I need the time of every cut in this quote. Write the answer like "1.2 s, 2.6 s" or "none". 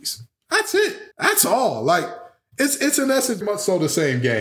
1.1 s, 3.4 s